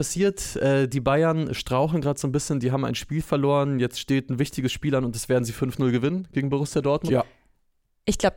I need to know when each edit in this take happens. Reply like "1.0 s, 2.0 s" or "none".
7.1 s